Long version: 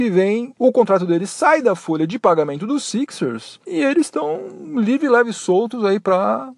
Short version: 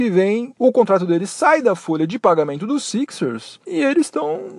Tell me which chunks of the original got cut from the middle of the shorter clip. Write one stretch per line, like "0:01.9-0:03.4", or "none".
none